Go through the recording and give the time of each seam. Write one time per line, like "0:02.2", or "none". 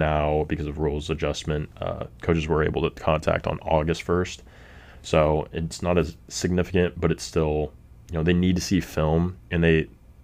none